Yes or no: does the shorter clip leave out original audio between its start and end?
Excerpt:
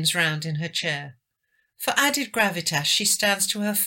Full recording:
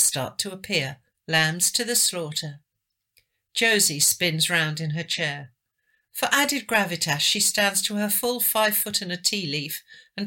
no